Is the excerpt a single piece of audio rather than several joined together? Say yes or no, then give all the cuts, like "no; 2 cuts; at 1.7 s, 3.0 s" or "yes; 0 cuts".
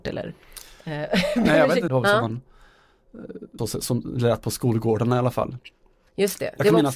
no; 2 cuts; at 1.9 s, 3.6 s